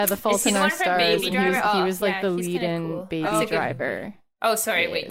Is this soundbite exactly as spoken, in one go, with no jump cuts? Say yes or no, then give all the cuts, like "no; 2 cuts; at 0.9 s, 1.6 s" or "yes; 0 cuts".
yes; 0 cuts